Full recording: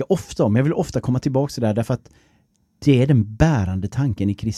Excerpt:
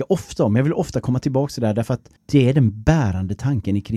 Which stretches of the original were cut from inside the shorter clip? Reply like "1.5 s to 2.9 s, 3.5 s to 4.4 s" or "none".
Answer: 2.2 s to 2.7 s